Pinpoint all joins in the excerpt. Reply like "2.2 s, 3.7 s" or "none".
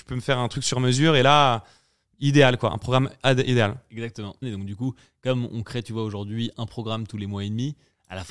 4.4 s